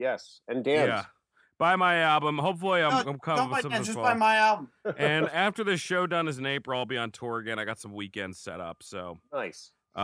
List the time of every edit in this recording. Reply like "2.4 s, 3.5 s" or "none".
none